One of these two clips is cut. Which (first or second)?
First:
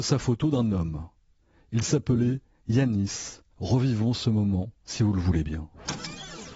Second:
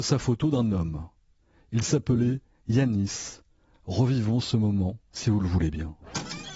first